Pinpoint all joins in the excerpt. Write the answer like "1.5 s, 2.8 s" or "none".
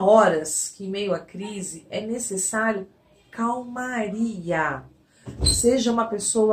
none